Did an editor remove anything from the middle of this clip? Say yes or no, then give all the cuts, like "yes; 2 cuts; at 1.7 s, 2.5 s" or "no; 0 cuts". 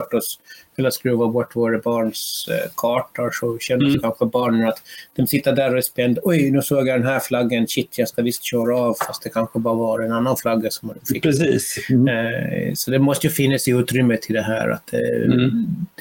no; 0 cuts